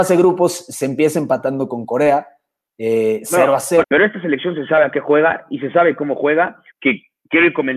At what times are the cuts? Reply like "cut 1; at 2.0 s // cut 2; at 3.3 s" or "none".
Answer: cut 1; at 3.8 s // cut 2; at 6.7 s